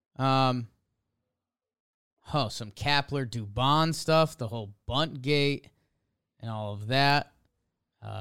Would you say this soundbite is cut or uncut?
uncut